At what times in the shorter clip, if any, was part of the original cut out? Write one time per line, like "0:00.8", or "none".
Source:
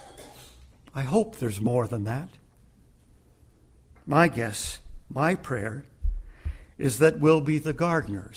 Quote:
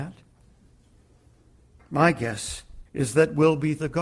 0:02.9